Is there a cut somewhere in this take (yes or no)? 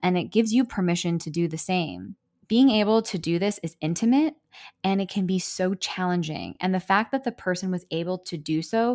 no